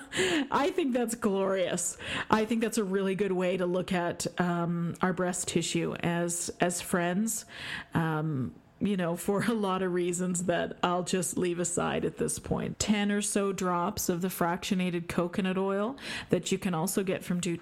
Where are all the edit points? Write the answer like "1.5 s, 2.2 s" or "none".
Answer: 12.7 s